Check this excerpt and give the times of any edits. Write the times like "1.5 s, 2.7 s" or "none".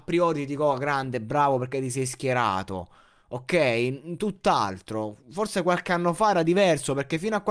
none